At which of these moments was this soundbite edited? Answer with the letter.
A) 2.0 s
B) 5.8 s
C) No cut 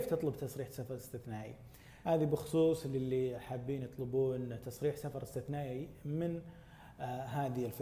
A